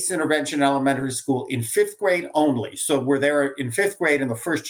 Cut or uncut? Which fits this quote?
uncut